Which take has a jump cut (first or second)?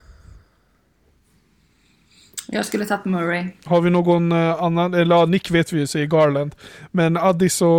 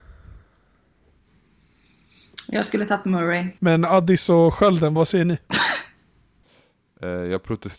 second